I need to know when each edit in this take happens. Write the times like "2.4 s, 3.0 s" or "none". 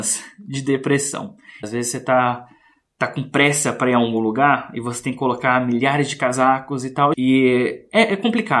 1.6 s, 7.1 s